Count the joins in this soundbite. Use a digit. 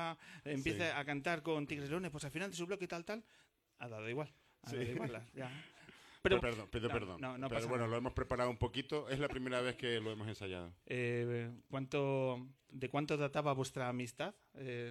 3